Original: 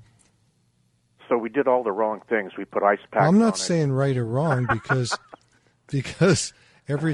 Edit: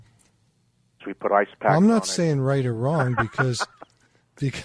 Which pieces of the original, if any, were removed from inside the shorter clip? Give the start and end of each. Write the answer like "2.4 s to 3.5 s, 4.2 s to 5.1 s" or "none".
1.0 s to 2.5 s